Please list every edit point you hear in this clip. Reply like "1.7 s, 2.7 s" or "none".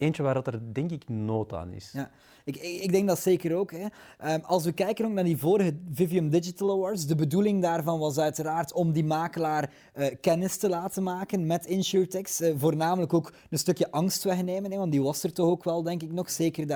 none